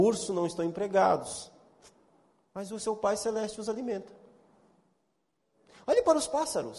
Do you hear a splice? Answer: no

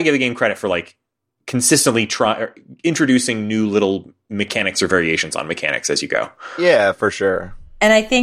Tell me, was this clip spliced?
no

